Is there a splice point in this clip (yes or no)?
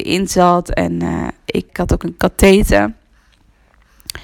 yes